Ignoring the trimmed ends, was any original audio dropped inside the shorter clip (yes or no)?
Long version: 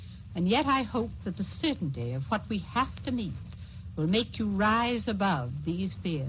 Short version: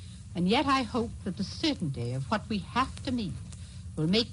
no